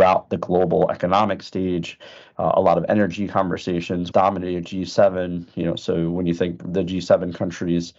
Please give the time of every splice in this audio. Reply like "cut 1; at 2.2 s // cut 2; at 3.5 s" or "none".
cut 1; at 4.1 s